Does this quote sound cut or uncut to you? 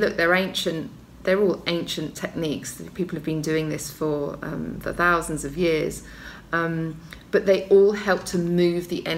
uncut